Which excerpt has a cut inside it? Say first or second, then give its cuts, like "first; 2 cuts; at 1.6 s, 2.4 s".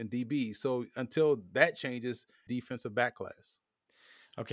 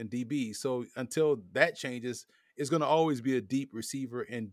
first; 1 cut; at 2.5 s